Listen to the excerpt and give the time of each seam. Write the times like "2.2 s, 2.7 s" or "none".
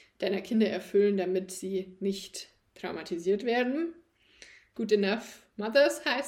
4.7 s